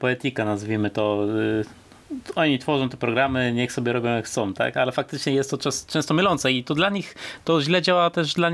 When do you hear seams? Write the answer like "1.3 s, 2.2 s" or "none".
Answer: none